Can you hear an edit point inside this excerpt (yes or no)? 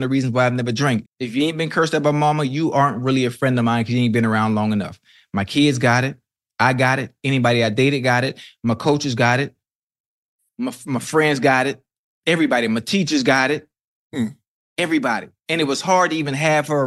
yes